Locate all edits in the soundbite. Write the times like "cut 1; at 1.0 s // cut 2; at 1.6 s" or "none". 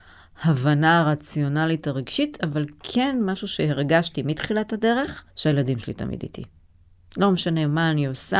cut 1; at 5.3 s

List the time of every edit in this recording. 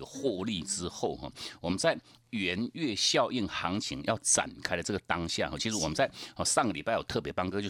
none

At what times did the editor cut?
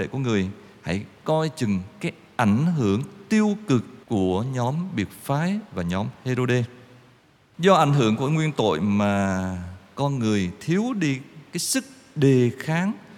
cut 1; at 4.0 s // cut 2; at 7.5 s

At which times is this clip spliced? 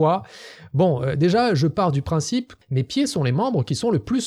cut 1; at 2.6 s

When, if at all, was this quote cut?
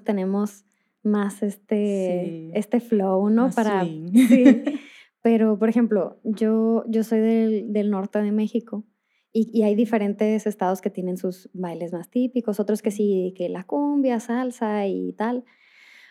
none

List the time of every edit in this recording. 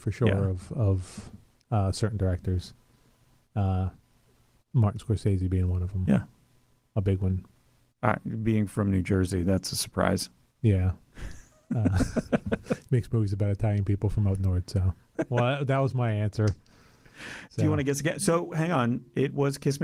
cut 1; at 15.1 s

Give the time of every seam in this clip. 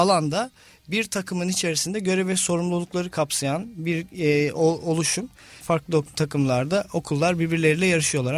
cut 1; at 5.6 s

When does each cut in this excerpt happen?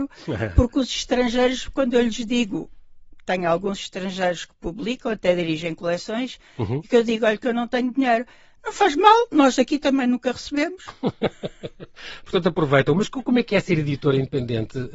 none

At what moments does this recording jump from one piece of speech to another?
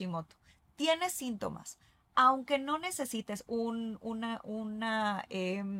none

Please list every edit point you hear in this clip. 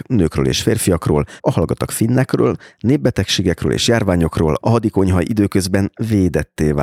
cut 1; at 1.4 s // cut 2; at 4.6 s

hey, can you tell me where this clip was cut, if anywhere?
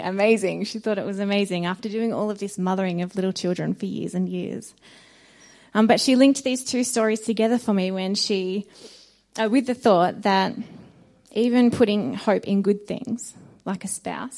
none

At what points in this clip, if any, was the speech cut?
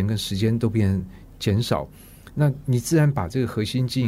cut 1; at 2.3 s

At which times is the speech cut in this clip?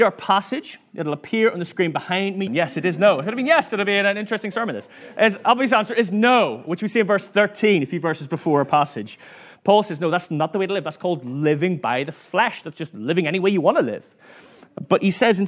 cut 1; at 2.5 s

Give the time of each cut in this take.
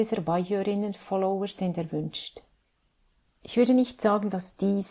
cut 1; at 3.4 s

